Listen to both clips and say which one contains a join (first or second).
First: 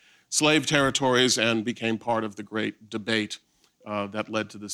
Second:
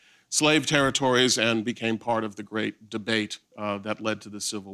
second